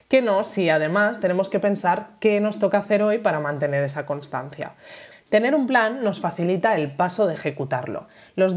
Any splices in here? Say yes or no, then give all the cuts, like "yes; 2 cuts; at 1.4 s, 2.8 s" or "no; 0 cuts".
yes; 1 cut; at 5.1 s